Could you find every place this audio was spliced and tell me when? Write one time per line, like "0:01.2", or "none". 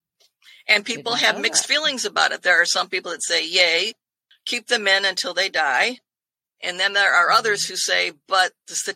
none